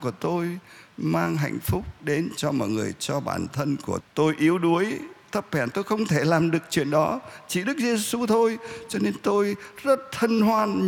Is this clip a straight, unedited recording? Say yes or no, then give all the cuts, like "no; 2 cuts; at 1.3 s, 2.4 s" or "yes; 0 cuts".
no; 1 cut; at 4.0 s